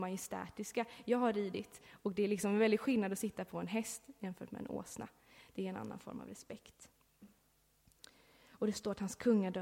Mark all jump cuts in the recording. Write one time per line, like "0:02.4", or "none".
none